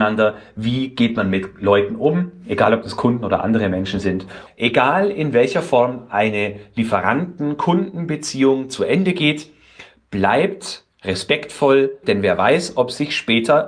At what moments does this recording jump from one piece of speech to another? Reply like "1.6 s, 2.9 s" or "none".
4.5 s, 12.0 s